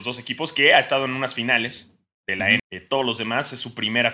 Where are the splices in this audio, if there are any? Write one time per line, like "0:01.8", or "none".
0:02.6